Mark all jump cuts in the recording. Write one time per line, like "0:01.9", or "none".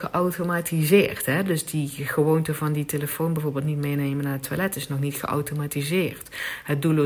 none